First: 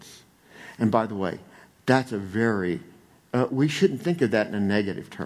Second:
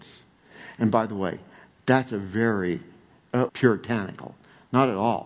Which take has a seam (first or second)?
second